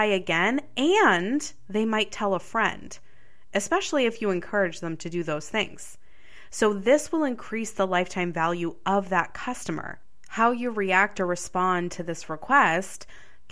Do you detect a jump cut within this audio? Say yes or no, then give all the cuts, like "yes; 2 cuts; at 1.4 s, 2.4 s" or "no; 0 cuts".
no; 0 cuts